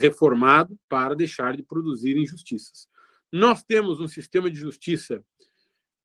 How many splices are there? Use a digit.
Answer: 1